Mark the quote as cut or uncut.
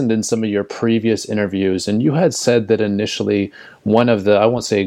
uncut